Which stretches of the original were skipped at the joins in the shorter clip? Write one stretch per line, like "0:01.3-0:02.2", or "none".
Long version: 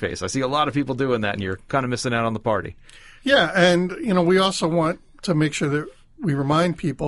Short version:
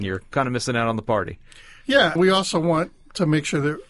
0:03.5-0:04.2